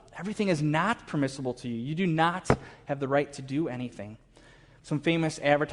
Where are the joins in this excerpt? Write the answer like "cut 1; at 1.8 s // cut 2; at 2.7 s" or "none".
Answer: cut 1; at 4.8 s